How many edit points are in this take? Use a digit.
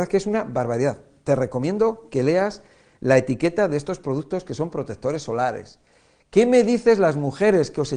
0